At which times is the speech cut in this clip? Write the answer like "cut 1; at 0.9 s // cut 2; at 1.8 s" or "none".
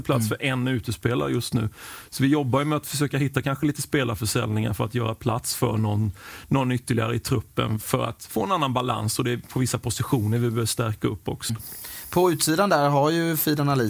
cut 1; at 11.5 s